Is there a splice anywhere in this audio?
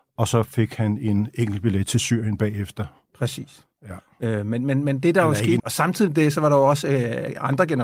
yes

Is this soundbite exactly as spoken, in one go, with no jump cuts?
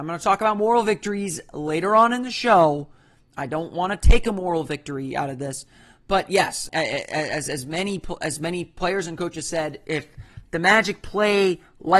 no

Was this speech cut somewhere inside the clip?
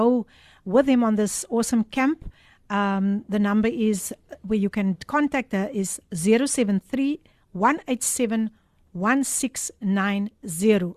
no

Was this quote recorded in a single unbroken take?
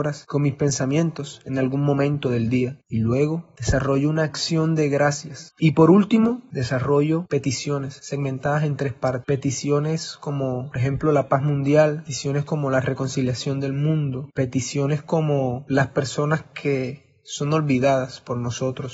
yes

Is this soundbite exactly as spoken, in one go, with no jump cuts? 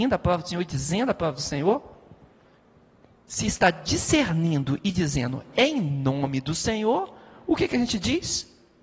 yes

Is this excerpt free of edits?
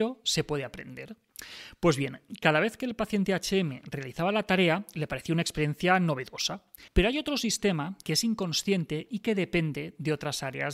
no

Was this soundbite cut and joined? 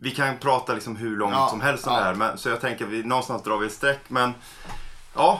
no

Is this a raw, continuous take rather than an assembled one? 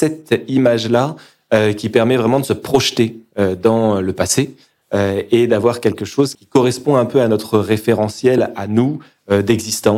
no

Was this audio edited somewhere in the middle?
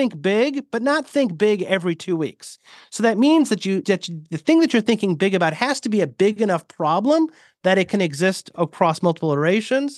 yes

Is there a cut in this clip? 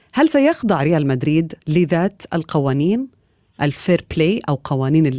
yes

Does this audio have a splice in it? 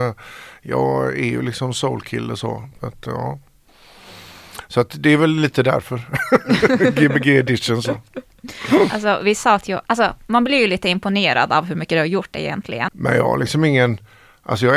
yes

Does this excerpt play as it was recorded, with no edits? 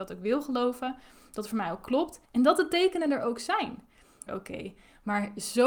no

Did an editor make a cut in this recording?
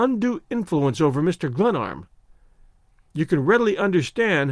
no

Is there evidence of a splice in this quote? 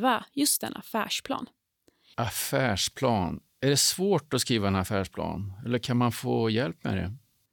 yes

